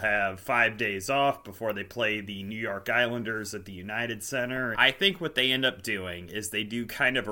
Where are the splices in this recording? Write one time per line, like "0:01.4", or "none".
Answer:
0:04.7